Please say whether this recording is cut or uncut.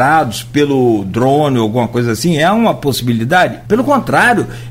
cut